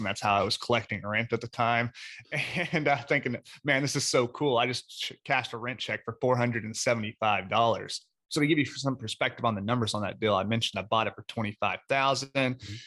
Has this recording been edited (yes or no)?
no